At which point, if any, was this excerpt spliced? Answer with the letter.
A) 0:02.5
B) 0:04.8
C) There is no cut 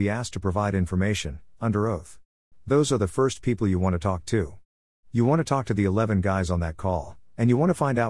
A